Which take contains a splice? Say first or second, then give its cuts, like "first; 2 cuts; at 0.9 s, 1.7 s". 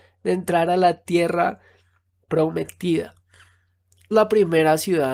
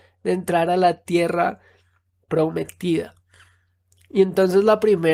first; 1 cut; at 4.1 s